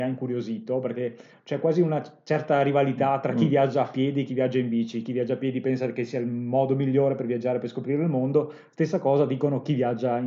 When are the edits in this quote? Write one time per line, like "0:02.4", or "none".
none